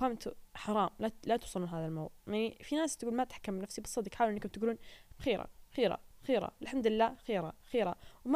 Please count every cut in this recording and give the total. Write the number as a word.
one